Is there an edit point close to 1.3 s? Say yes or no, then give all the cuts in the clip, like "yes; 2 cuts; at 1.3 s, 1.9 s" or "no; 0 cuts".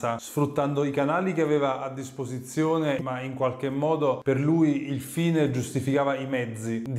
no; 1 cut; at 3.0 s